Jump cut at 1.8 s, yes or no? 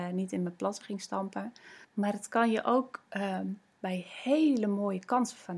yes